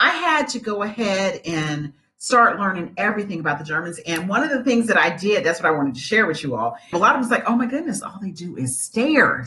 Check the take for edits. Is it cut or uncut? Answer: cut